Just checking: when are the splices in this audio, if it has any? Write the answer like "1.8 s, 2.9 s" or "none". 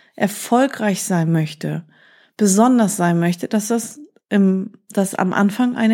none